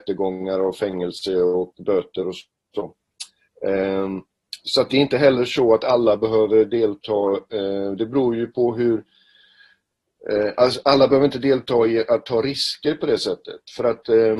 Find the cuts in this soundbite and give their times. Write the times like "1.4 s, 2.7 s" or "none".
none